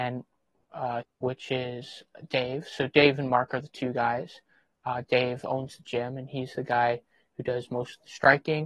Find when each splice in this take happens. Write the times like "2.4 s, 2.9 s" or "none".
1.0 s